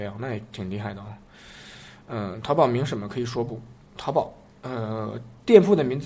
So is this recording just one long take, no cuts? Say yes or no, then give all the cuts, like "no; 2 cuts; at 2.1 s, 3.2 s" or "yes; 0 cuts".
yes; 0 cuts